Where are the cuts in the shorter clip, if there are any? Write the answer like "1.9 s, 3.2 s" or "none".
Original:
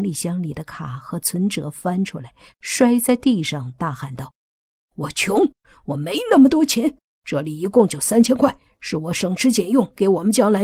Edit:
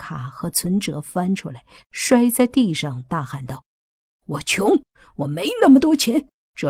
none